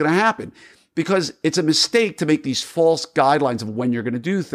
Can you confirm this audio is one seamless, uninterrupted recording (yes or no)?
yes